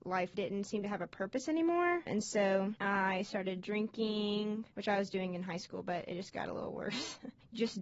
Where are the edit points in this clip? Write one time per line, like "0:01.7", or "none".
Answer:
none